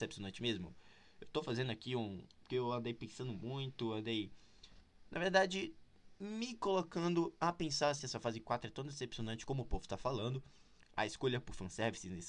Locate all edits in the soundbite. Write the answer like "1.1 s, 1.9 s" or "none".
8.0 s, 10.8 s